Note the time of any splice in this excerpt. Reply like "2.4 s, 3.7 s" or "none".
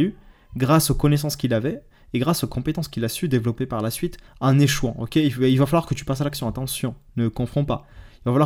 none